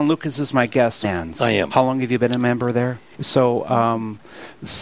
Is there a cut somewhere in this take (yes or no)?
yes